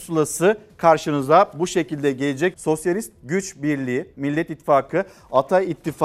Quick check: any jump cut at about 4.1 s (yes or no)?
yes